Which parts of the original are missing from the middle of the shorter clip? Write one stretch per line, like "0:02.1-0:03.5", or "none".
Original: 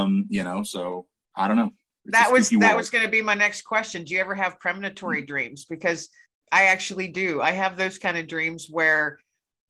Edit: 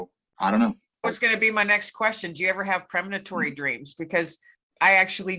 0:02.0-0:02.7